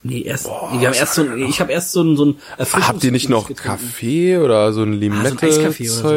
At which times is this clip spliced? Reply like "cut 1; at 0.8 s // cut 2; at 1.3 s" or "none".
none